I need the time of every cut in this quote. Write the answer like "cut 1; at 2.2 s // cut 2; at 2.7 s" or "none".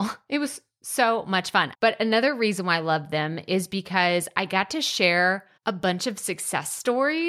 cut 1; at 1.7 s // cut 2; at 5.6 s